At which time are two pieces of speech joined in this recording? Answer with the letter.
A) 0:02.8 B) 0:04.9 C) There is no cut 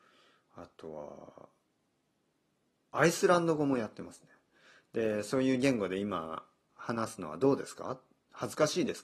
C